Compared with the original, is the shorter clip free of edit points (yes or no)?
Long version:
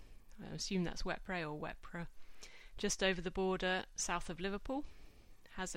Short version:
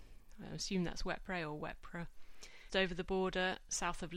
no